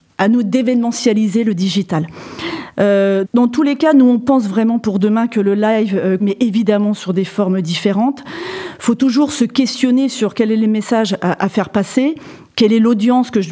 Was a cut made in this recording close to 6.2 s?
yes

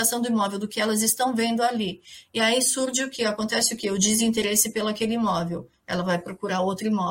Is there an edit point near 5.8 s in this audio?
no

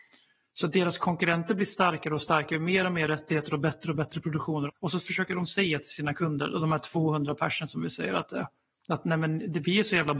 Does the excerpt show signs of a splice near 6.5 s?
no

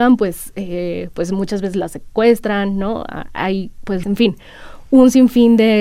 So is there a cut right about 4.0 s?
yes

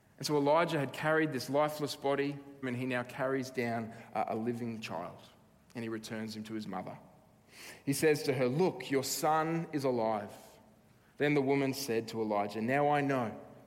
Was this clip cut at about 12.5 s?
no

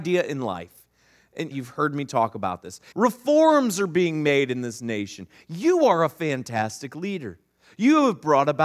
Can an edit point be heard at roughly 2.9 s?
yes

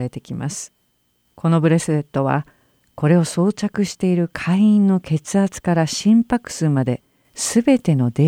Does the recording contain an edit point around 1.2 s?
no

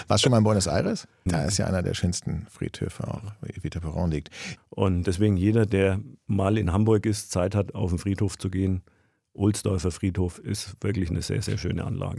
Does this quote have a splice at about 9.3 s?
no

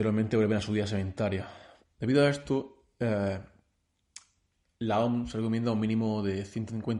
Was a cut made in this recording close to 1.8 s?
yes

